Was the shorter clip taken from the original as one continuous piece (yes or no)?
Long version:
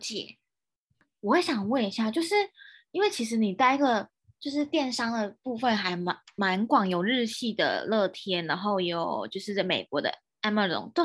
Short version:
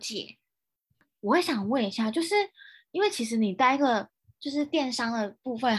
yes